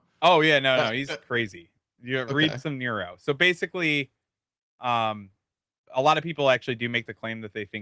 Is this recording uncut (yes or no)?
yes